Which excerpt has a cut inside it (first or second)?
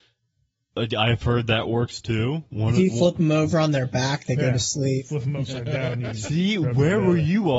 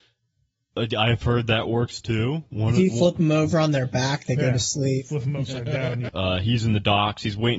second